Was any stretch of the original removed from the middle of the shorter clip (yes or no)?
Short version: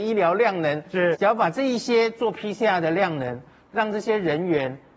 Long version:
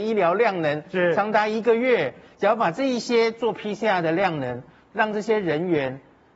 yes